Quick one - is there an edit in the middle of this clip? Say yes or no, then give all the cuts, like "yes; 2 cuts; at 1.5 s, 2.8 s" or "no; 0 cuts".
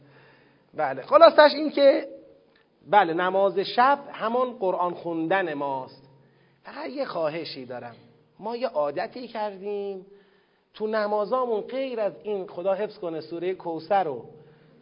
no; 0 cuts